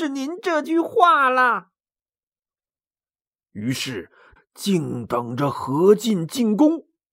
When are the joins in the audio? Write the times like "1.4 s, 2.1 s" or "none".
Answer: 4.4 s